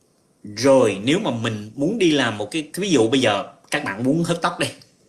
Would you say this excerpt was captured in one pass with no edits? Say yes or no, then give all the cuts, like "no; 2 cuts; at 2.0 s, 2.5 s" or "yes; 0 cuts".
no; 1 cut; at 2.7 s